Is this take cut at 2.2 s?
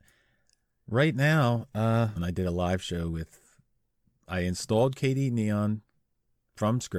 yes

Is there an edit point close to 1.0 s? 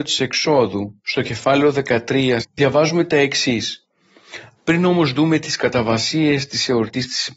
no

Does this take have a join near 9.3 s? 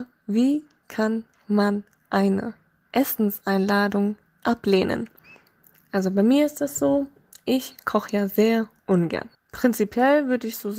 yes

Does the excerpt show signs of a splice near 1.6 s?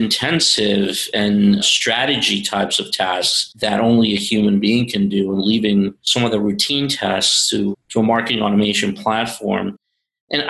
yes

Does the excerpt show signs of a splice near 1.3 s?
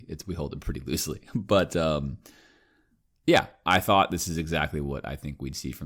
no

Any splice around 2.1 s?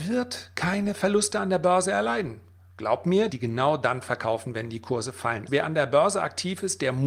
no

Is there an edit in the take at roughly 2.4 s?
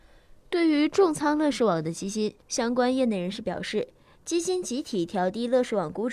yes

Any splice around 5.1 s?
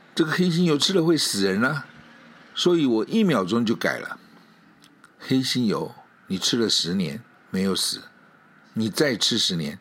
yes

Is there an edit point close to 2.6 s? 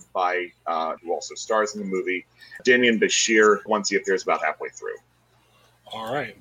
yes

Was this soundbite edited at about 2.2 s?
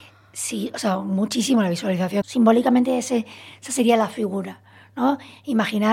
yes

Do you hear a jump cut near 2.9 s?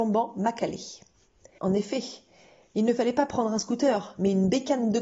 no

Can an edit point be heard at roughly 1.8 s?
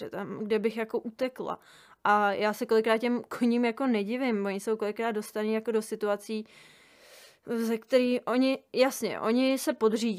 no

